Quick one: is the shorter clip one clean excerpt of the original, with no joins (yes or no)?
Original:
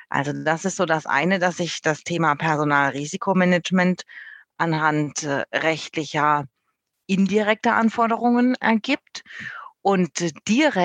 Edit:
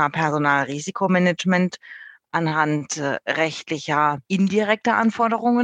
no